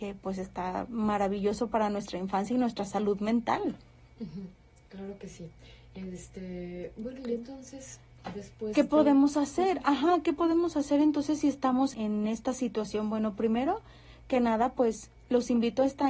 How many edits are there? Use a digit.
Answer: 1